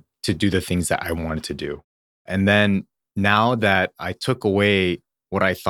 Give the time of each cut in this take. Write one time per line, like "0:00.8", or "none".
none